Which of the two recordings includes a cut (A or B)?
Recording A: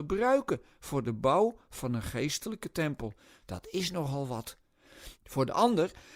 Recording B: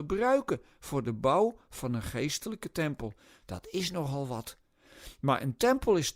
A